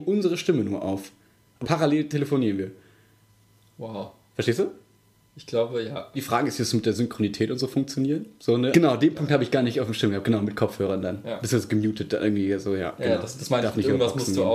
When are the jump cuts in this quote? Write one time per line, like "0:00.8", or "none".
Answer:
0:01.6
0:06.1
0:08.7